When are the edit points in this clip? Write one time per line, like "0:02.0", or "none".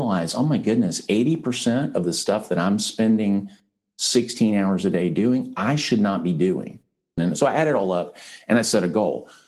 0:07.2